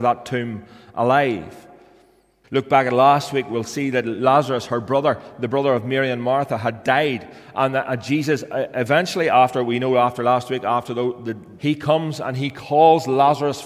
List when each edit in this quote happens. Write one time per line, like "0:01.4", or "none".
0:02.4
0:11.6